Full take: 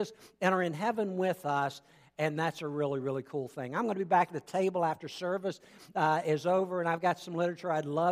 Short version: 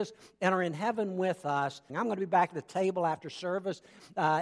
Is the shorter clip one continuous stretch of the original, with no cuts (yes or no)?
no